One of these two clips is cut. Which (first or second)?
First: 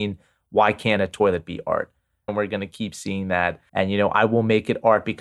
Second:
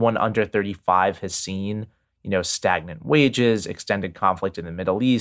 first